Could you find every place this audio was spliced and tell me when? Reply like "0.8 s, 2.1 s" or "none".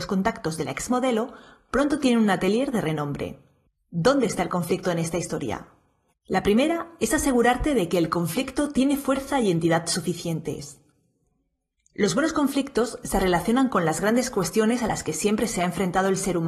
6.1 s